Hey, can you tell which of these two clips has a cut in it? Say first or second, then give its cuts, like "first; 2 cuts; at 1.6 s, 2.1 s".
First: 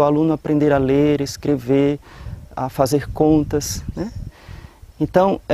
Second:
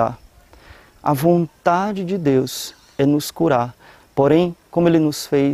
second; 1 cut; at 4.0 s